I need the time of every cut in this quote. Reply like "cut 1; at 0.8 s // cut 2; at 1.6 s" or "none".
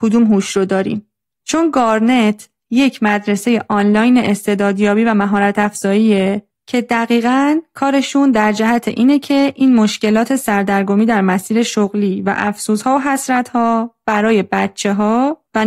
cut 1; at 1.4 s